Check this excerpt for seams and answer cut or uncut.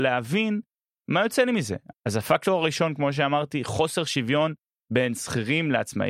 cut